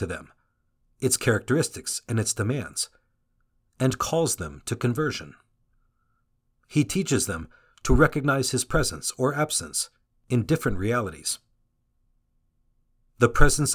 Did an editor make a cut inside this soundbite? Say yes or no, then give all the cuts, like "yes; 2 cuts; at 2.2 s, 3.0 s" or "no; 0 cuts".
no; 0 cuts